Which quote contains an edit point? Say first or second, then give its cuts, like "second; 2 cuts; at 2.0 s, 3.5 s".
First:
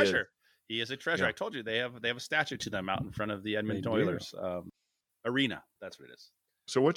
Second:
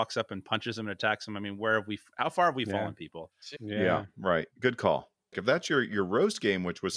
second; 2 cuts; at 3.6 s, 5.3 s